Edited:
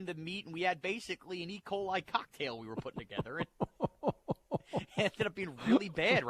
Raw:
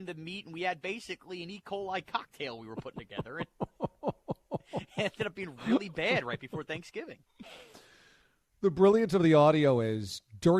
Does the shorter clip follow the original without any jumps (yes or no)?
yes